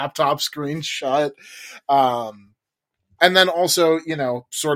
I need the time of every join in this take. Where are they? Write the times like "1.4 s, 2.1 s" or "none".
3.2 s